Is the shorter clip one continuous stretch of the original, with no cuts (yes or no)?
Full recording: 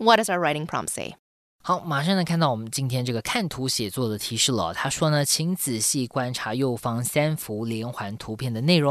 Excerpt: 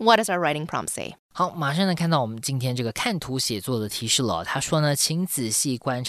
no